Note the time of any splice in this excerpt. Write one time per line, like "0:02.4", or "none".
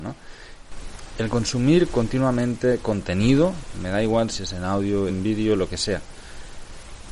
0:05.1